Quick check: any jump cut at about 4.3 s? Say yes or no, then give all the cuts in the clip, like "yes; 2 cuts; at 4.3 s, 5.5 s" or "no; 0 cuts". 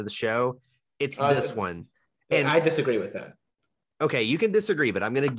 no; 0 cuts